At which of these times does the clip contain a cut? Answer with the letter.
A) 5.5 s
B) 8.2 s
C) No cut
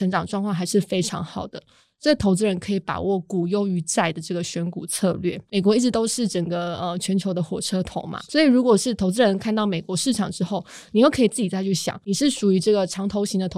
A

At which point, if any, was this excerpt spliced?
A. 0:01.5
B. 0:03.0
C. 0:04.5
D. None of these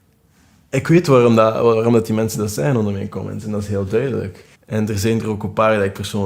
C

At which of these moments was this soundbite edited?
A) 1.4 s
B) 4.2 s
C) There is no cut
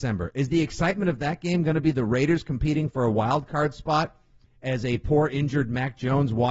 C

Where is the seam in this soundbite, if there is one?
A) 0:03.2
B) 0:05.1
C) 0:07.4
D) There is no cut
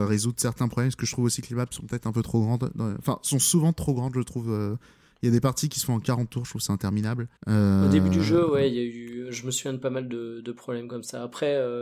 C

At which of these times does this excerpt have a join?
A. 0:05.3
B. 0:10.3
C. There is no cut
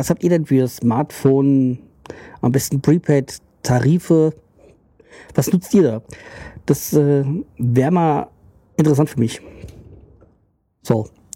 C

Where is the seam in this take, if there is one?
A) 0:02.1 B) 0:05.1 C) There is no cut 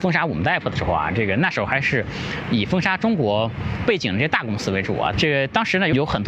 B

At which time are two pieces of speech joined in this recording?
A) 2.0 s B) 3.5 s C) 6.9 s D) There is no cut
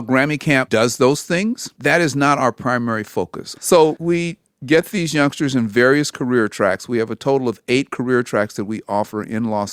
B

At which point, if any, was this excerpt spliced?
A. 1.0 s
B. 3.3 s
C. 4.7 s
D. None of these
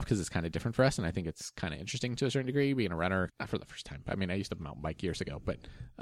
B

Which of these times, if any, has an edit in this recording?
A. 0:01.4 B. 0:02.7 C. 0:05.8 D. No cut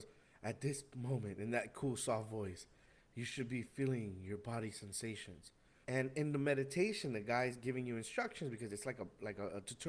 C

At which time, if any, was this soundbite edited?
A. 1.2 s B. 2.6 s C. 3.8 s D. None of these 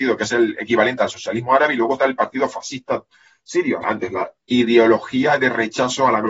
C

